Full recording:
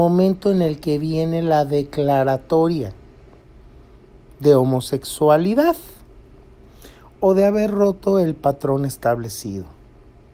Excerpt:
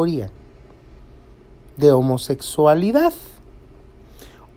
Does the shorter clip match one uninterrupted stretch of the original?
yes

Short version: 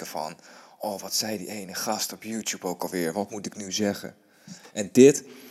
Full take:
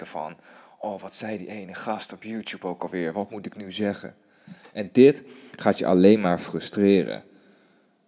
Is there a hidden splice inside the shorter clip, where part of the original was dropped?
no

